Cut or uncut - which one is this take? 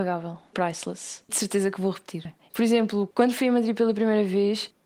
cut